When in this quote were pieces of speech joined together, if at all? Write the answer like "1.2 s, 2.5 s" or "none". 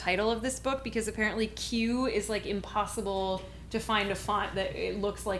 none